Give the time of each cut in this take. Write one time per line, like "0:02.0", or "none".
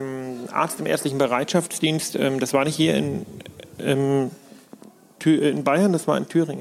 none